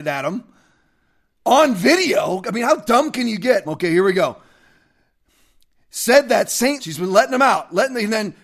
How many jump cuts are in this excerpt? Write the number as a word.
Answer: two